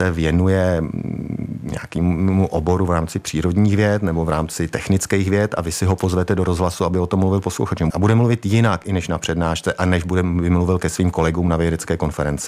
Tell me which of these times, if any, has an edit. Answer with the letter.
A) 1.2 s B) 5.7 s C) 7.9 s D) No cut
C